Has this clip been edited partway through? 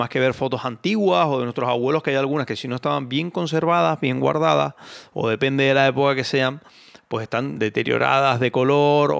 no; 0 cuts

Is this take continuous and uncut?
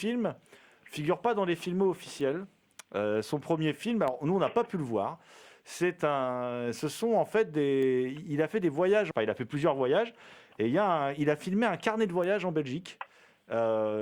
no; 1 cut; at 9.1 s

